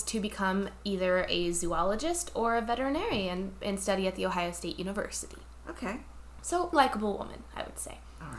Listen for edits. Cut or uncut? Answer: cut